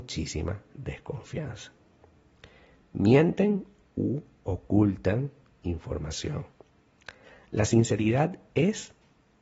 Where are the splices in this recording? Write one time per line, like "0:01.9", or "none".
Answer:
none